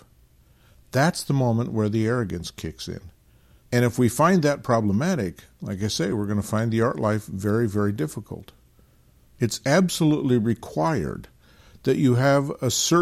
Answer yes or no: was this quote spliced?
no